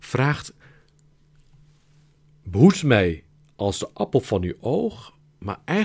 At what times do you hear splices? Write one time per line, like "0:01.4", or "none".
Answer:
none